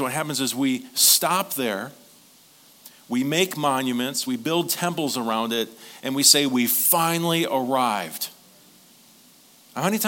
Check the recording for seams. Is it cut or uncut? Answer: uncut